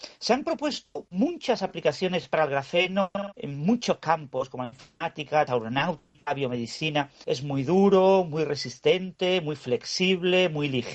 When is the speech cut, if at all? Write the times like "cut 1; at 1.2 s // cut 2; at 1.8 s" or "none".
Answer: cut 1; at 5.5 s // cut 2; at 7.2 s